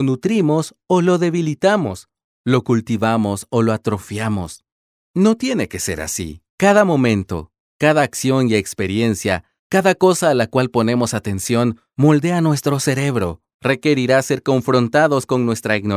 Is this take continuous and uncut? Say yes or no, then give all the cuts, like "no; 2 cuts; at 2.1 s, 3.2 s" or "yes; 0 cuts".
no; 3 cuts; at 5.0 s, 6.5 s, 13.5 s